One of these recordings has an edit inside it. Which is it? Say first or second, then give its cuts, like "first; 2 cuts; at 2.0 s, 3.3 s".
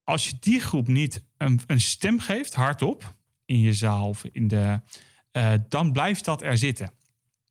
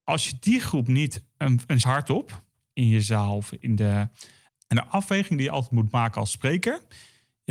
second; 2 cuts; at 1.8 s, 4.5 s